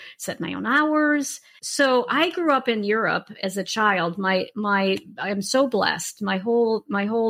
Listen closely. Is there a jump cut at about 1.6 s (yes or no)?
yes